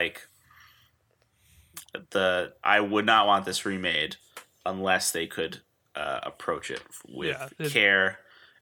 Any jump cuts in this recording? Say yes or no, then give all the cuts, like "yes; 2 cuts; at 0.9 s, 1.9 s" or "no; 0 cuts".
no; 0 cuts